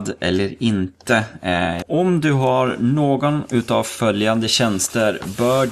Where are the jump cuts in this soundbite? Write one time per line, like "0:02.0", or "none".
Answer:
0:01.8